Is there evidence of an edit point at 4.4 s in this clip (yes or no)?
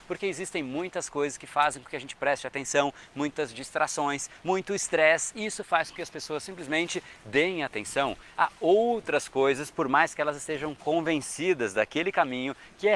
yes